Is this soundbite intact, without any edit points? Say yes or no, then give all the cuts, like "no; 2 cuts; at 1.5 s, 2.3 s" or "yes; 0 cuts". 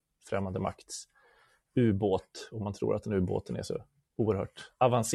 yes; 0 cuts